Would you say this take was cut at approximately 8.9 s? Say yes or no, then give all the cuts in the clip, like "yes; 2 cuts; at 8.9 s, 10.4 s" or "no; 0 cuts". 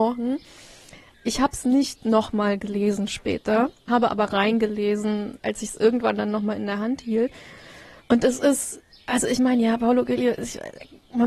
no; 0 cuts